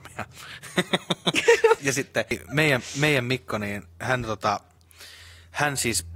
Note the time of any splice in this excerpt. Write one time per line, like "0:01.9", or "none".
0:01.8